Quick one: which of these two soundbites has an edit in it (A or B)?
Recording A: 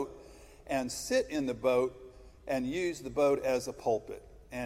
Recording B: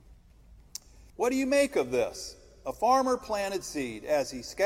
B